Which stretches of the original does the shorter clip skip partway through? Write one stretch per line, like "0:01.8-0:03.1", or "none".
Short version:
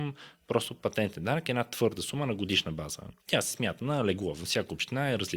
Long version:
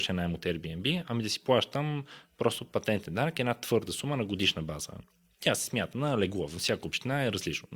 0:05.1-0:05.3

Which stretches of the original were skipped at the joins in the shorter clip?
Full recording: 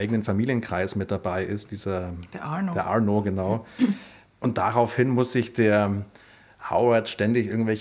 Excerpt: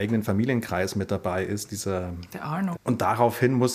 0:02.7-0:04.3

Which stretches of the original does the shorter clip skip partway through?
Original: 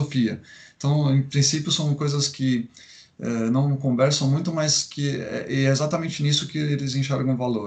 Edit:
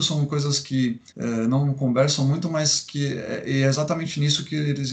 0:02.8-0:03.1

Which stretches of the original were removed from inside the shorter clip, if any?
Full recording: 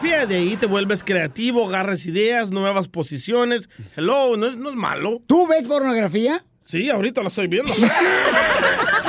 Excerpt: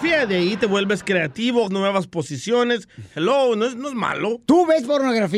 0:01.7-0:02.5

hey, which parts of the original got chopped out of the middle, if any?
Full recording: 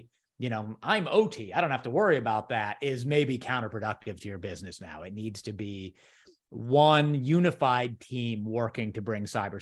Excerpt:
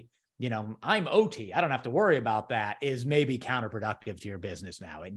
none

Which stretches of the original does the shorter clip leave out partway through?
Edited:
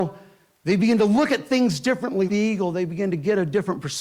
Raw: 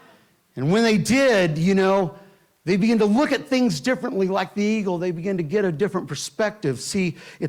0:04.3-0:04.5

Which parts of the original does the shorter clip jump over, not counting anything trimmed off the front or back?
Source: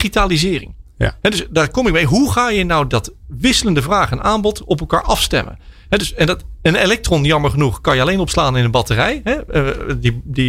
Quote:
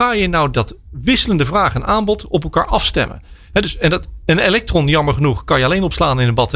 none

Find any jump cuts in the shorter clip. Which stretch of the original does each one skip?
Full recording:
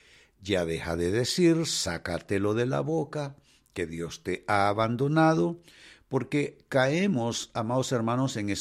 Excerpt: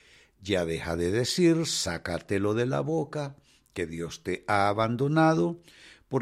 none

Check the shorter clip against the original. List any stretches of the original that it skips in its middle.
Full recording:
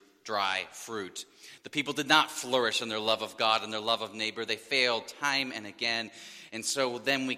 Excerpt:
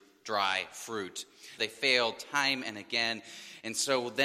0:01.6-0:04.5

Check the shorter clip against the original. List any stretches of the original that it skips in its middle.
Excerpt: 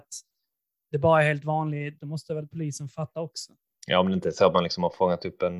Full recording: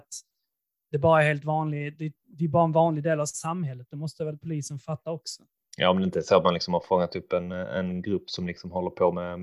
0:02.0-0:03.9

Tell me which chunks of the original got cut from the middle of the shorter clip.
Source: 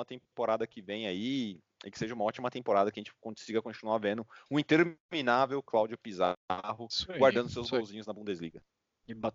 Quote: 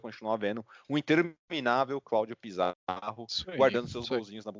none

